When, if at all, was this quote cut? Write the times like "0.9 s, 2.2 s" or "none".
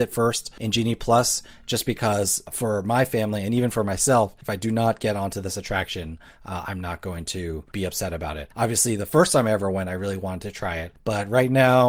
none